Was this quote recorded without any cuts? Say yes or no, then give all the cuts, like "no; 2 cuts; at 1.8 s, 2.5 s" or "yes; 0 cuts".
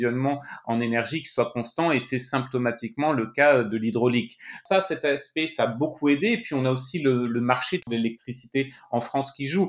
yes; 0 cuts